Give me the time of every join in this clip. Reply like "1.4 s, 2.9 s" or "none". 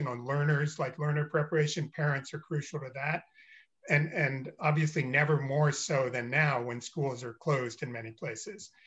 none